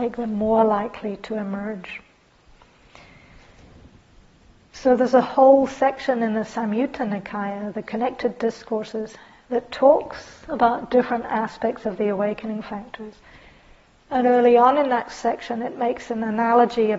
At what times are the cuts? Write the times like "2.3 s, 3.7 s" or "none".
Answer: none